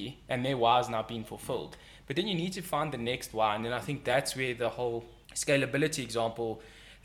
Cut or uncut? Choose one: cut